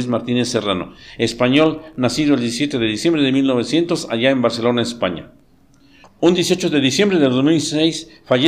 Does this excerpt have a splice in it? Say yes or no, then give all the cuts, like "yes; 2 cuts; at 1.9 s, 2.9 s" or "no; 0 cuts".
yes; 1 cut; at 6.0 s